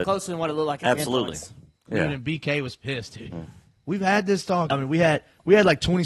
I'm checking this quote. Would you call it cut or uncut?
cut